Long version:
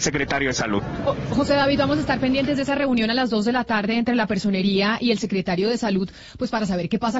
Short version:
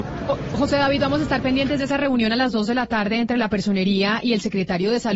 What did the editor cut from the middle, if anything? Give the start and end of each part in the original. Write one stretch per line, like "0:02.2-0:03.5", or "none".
none